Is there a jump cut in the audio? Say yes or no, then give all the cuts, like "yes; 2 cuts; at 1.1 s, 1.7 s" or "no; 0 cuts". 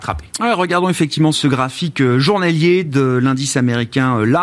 yes; 1 cut; at 1.3 s